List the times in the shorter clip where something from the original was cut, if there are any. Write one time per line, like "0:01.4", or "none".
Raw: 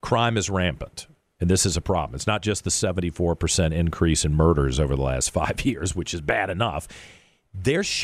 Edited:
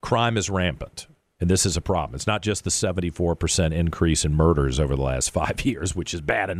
none

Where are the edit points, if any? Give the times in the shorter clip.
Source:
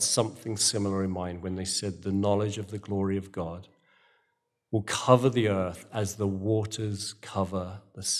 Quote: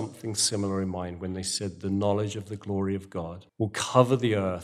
0:03.5

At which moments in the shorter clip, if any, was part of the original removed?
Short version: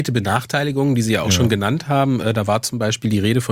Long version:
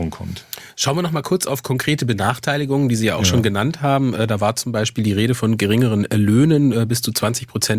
none

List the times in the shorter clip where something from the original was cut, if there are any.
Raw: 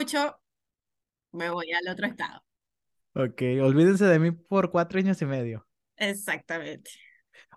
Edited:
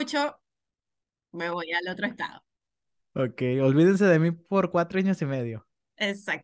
none

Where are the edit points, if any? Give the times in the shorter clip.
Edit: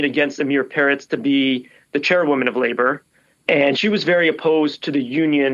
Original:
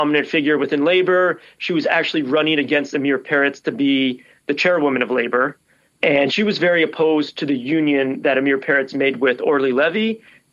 none

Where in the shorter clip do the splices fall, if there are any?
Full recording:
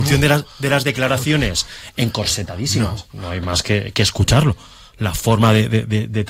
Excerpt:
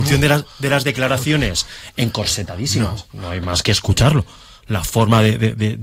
0:03.6

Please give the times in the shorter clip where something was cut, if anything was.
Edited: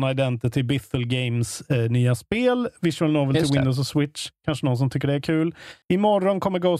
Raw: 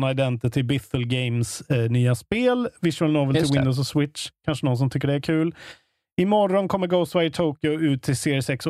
0:05.8

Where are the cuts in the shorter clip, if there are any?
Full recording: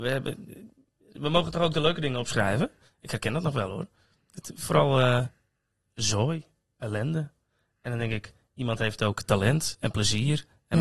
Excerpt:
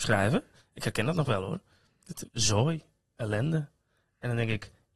0:02.3

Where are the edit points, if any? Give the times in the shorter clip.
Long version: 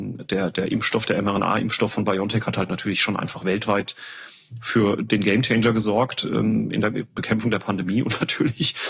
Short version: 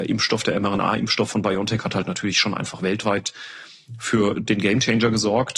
none

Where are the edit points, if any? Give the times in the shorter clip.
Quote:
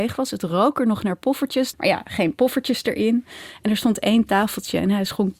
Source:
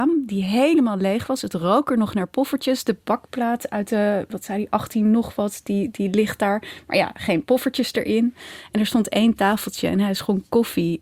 0:01.7

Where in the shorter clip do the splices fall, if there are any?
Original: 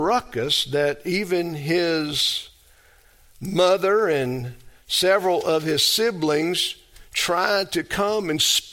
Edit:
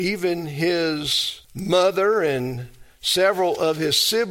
0:01.4

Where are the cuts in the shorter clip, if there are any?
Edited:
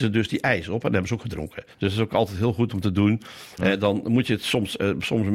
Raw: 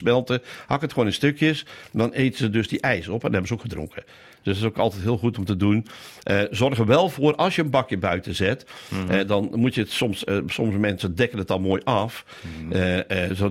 0:01.7
0:03.6

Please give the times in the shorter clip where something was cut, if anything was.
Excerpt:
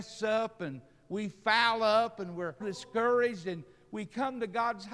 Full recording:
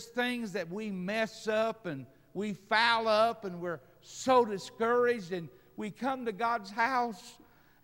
0:02.6

